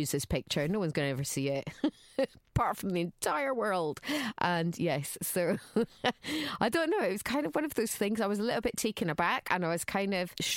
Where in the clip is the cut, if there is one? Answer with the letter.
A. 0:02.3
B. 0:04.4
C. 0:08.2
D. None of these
D